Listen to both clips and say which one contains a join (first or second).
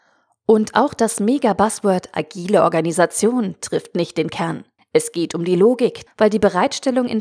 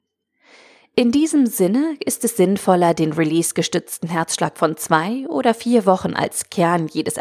first